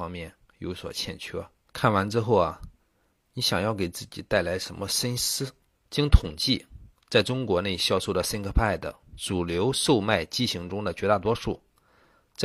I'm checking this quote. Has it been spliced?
yes; 2 cuts; at 1.7 s, 5.7 s

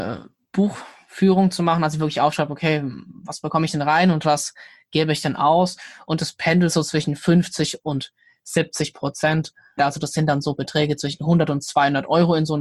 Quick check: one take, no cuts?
no; 1 cut; at 9.8 s

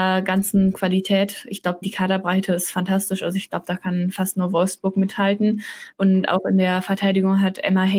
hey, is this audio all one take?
no; 2 cuts; at 1.8 s, 5.9 s

